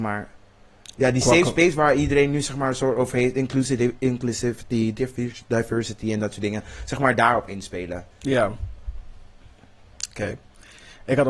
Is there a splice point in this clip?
no; 0 cuts

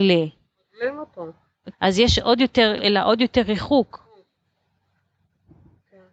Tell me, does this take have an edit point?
yes; 2 cuts; at 1.7 s, 2.8 s

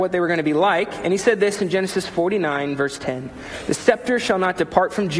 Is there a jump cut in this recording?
no; 0 cuts

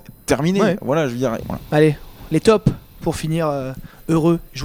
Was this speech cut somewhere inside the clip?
yes; 1 cut; at 1.4 s

